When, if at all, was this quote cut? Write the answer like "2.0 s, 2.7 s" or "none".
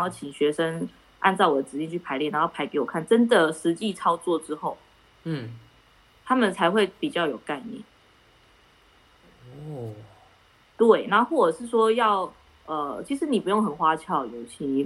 none